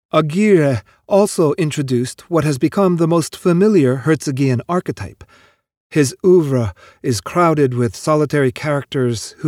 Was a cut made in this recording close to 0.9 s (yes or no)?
no